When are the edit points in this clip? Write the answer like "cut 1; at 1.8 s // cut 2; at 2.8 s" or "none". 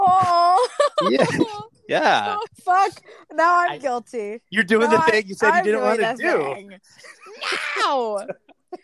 cut 1; at 2.5 s